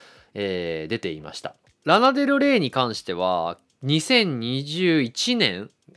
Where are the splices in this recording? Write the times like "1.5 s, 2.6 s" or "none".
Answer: 1.7 s